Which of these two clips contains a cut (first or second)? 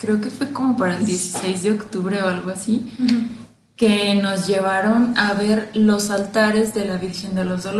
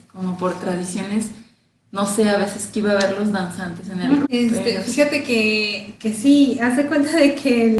second